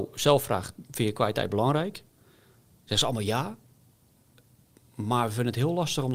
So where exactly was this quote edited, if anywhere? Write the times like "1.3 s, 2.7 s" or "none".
none